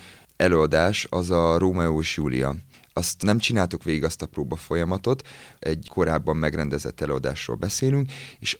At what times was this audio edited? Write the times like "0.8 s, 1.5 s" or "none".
5.6 s